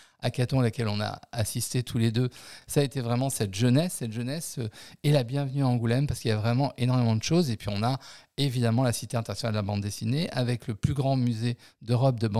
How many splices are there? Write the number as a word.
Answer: zero